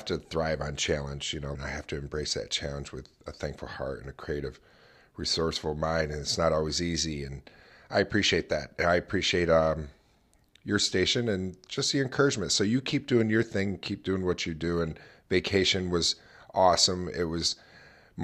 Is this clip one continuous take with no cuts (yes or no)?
no